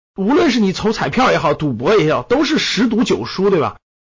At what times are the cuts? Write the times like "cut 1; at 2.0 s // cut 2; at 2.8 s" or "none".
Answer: none